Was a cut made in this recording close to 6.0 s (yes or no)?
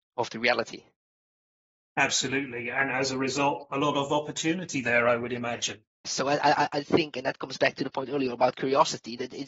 yes